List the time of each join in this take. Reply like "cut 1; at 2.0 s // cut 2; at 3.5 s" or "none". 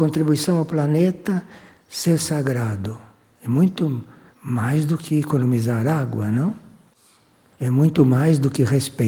none